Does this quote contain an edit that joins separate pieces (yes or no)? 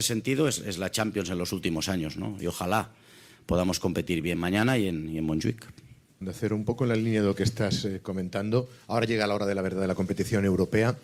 yes